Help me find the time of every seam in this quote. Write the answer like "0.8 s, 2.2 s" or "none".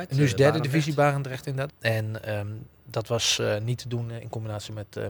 1.7 s